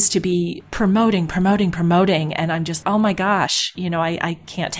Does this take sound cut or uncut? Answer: cut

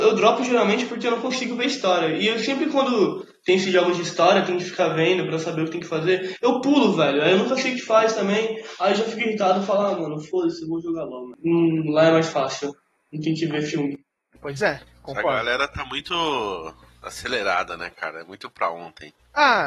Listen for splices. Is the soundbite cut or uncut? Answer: uncut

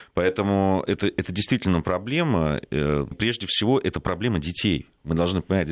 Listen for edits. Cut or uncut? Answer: cut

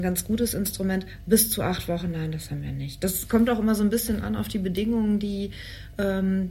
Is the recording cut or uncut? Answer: uncut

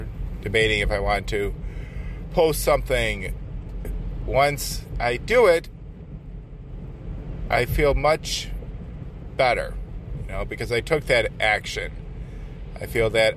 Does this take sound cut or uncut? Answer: cut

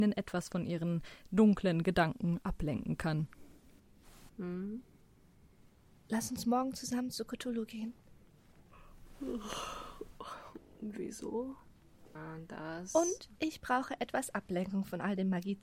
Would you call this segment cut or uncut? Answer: cut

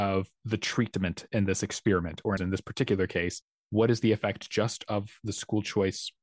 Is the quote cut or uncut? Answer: cut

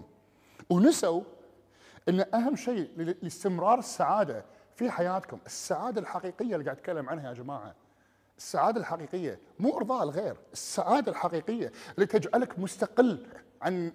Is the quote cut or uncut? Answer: uncut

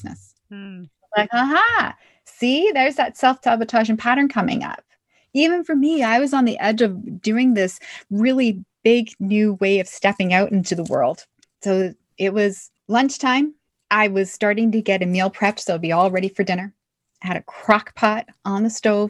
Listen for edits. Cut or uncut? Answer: cut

